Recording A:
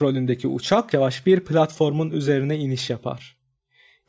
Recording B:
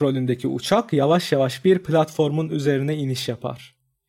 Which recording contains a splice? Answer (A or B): A